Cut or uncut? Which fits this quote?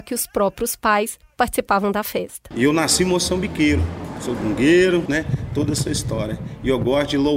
cut